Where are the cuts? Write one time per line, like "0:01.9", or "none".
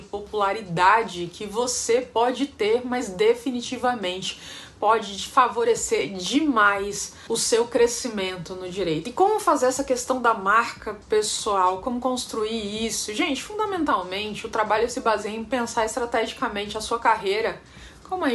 none